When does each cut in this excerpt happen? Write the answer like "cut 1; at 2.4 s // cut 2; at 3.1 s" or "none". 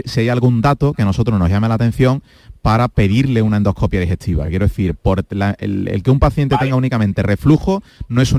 none